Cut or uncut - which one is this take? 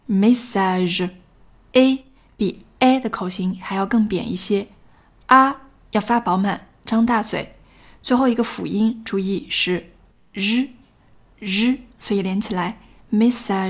cut